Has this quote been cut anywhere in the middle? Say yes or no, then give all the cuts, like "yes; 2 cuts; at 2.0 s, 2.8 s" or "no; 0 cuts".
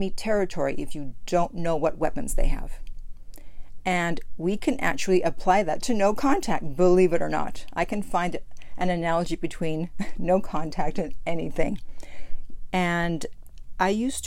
yes; 1 cut; at 12.7 s